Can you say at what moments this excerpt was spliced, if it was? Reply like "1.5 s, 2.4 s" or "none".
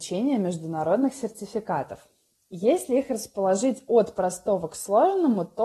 none